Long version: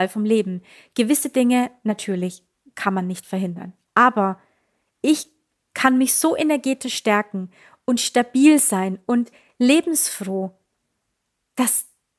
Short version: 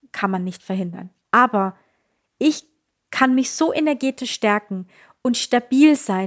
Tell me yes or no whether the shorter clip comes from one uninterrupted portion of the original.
yes